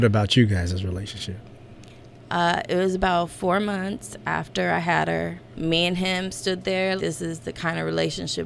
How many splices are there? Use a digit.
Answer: 2